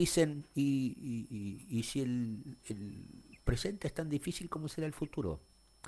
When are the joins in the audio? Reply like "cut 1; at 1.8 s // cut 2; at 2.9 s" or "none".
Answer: none